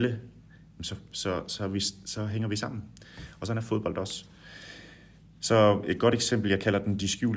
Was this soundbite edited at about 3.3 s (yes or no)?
no